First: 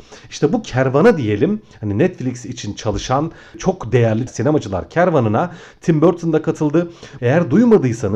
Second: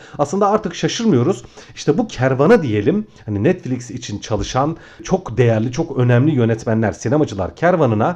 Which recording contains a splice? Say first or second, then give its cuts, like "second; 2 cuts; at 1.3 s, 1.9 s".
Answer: first; 2 cuts; at 4.3 s, 7.2 s